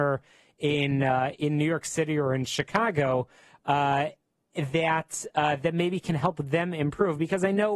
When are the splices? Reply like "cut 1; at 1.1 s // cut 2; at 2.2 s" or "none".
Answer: none